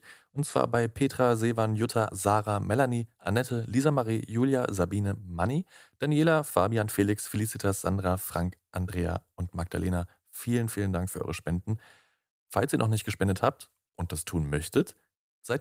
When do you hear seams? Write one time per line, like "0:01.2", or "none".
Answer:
0:02.1